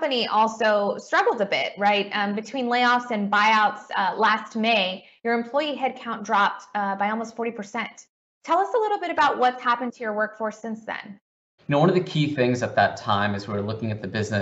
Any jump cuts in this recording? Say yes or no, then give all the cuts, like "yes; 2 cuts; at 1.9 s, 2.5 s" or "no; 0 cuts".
yes; 1 cut; at 11.6 s